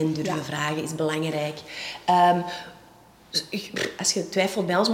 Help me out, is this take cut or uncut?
uncut